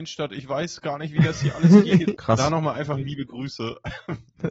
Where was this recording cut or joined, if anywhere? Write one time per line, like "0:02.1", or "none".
0:02.1

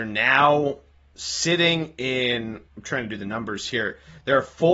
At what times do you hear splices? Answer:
0:02.7

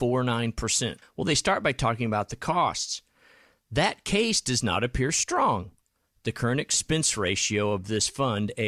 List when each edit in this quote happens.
0:01.0

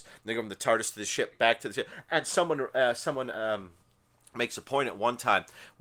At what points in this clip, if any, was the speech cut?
0:01.3

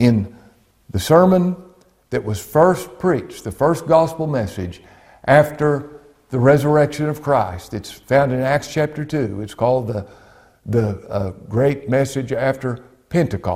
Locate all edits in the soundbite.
none

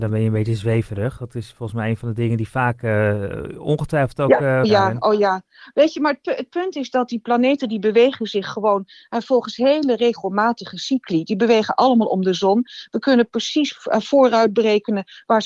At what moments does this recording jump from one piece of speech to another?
0:04.6

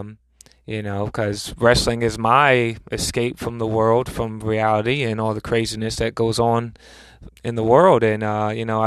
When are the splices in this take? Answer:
0:07.3

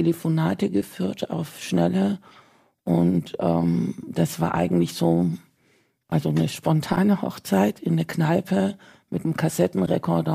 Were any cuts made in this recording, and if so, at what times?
none

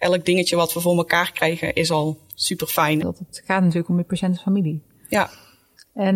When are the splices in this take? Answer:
0:03.0

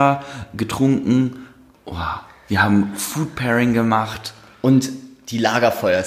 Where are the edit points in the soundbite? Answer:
none

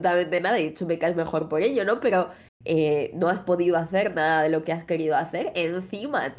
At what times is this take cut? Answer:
none

